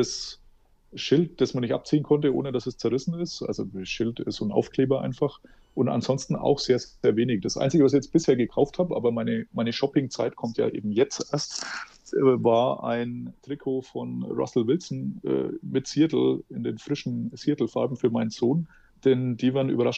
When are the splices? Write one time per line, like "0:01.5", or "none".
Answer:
none